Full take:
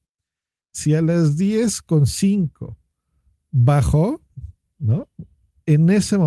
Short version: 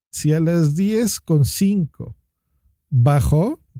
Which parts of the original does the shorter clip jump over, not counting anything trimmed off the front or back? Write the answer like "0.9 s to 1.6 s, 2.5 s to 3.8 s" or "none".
none